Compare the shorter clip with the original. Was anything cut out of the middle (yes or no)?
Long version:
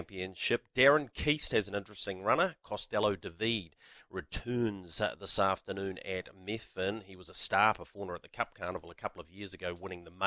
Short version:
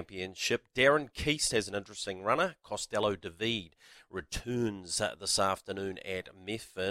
no